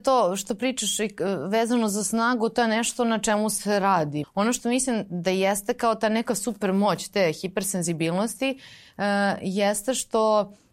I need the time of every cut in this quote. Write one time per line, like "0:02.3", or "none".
0:04.2